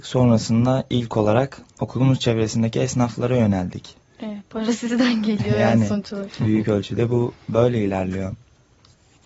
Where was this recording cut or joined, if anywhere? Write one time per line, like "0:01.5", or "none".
0:04.0